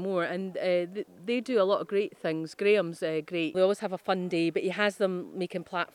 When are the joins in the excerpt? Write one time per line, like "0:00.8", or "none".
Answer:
0:03.5